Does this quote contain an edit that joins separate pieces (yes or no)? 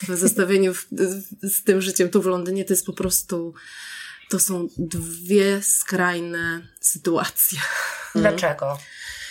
yes